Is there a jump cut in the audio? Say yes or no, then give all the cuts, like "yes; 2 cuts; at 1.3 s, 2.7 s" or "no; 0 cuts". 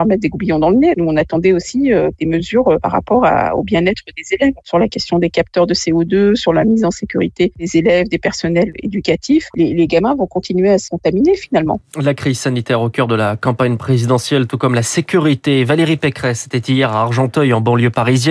yes; 1 cut; at 9.5 s